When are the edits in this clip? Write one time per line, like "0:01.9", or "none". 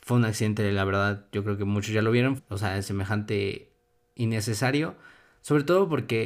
0:02.4

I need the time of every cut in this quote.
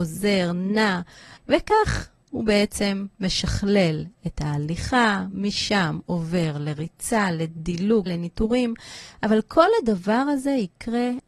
0:01.4
0:08.1

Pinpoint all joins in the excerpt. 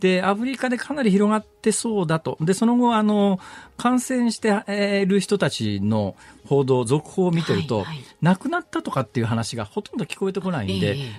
none

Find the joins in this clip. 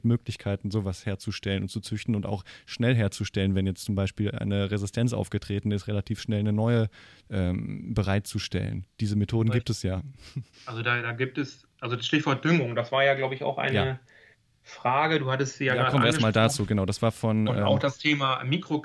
0:10.5

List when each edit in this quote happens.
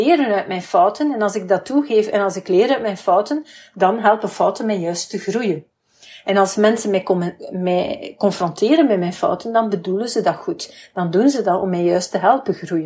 none

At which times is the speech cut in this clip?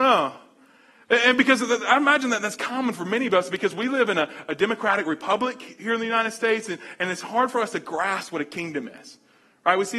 none

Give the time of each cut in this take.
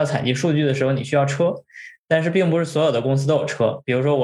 none

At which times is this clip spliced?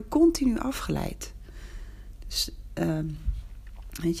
none

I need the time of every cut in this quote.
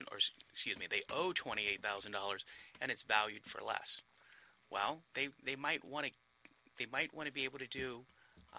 0:05.1

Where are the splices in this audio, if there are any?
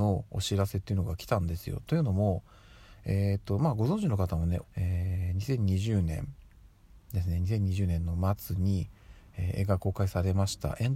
0:04.6

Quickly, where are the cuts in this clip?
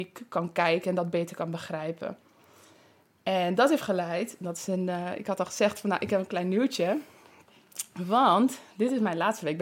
none

